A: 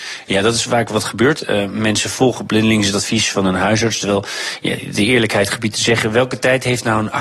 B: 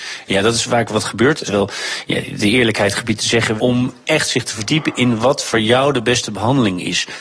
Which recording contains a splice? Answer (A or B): B